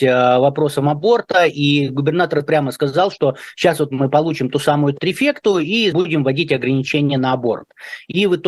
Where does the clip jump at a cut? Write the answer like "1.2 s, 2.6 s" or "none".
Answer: 5.9 s

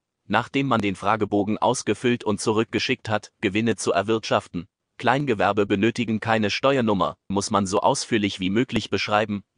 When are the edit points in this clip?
3.3 s, 4.8 s, 7.3 s

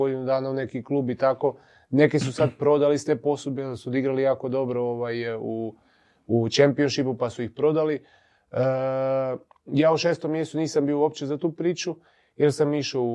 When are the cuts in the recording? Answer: none

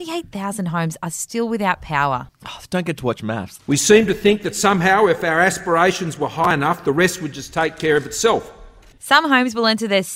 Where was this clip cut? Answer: 3.6 s, 9.0 s

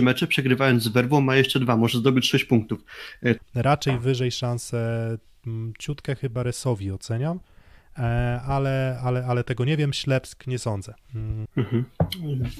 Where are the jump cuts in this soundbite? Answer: 3.4 s, 11.5 s

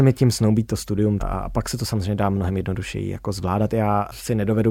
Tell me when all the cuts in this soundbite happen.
1.2 s

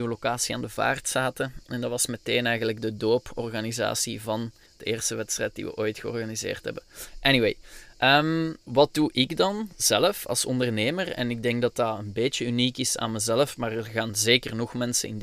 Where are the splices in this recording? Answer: 4.7 s, 8.6 s

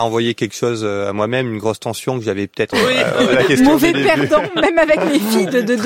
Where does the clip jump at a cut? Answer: 2.7 s

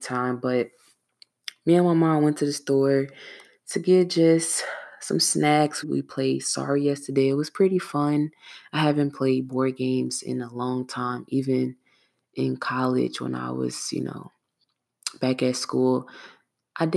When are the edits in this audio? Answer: 5.8 s

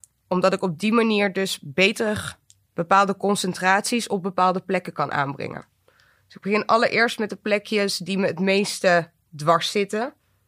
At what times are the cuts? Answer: none

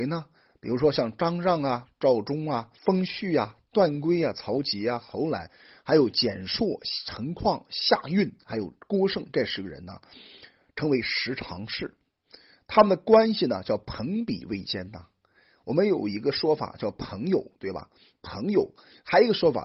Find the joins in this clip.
2.8 s

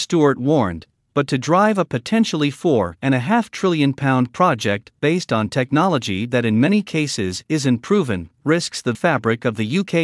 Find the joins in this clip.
8.9 s

